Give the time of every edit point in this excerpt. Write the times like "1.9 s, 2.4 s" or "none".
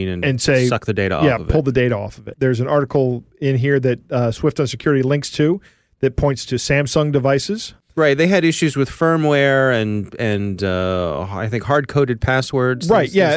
2.3 s